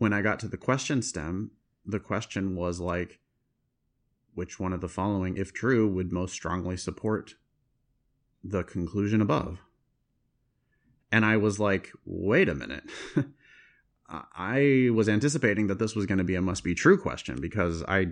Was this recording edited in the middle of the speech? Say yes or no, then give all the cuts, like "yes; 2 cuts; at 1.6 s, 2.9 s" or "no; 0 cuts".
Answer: no; 0 cuts